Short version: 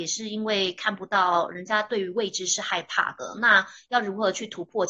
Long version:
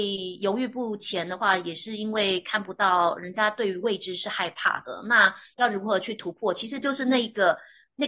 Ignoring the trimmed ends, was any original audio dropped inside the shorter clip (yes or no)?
no